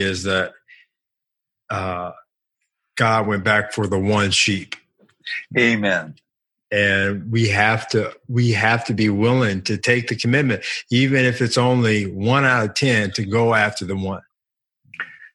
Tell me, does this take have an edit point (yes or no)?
no